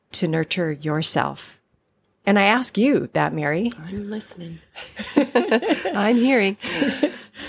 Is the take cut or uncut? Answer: uncut